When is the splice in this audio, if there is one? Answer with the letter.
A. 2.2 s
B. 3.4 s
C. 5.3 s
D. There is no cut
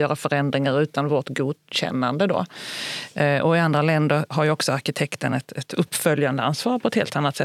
D